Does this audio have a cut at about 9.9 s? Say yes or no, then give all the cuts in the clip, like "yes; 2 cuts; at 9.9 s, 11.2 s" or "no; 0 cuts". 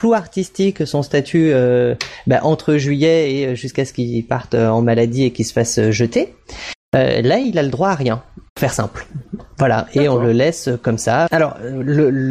no; 2 cuts; at 8.5 s, 11.3 s